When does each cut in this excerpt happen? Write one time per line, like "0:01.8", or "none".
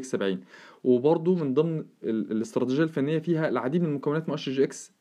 0:02.0